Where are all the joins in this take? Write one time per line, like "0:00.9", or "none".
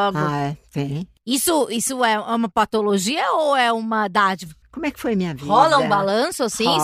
0:04.6